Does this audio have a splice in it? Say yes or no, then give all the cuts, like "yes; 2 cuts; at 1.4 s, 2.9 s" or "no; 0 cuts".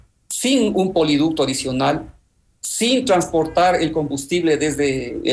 no; 0 cuts